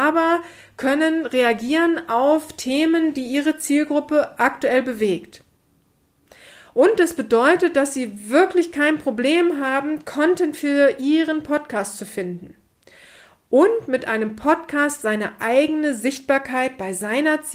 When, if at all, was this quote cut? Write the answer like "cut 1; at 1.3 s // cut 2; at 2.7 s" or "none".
none